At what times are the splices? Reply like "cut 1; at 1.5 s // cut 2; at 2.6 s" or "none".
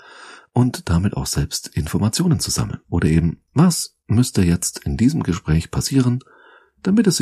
cut 1; at 2.8 s

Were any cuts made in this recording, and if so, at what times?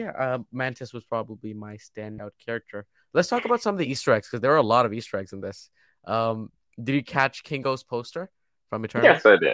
none

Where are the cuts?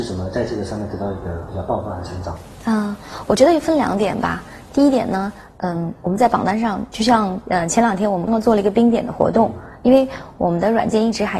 cut 1; at 8.3 s

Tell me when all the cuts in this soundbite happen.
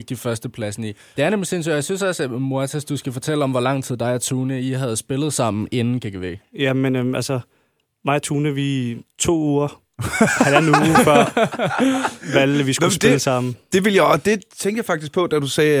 cut 1; at 1.1 s

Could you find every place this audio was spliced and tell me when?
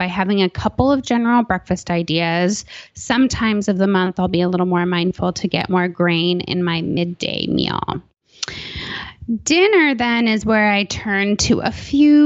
cut 1; at 2.9 s

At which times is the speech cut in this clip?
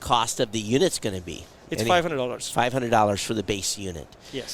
none

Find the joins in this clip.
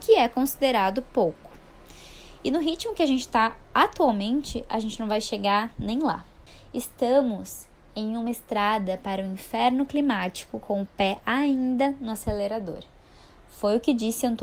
none

